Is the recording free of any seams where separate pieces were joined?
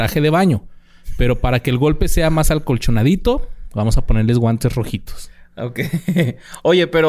yes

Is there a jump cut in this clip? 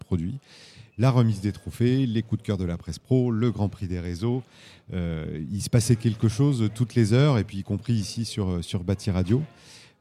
no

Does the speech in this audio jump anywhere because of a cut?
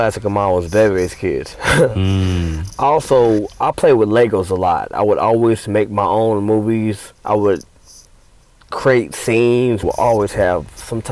yes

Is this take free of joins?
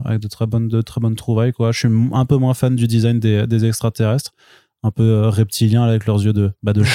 yes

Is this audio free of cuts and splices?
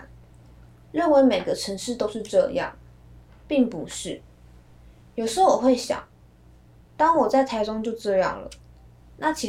no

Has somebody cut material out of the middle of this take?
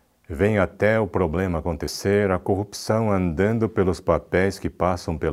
no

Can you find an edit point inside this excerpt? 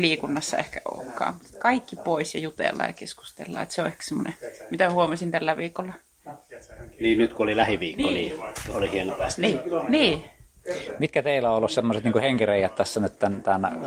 no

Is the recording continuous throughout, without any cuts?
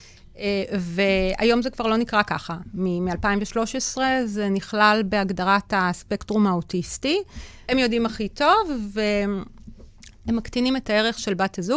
no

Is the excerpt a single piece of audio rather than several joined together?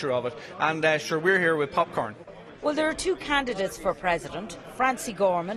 yes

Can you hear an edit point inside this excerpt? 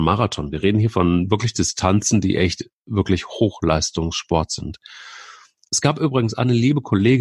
yes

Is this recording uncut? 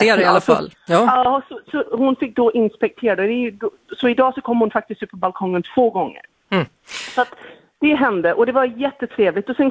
yes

